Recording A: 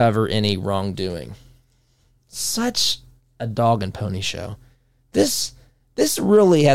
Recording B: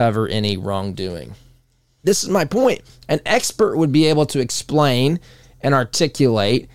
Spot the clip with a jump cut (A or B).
B